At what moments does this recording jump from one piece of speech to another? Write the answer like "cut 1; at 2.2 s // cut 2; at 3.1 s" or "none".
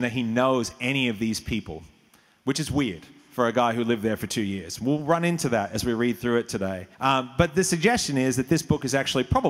cut 1; at 6.9 s